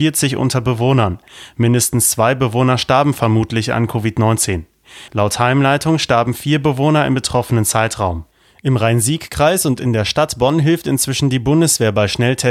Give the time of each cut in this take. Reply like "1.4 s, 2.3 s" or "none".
5.1 s